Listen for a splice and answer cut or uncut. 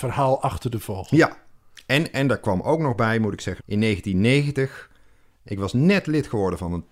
cut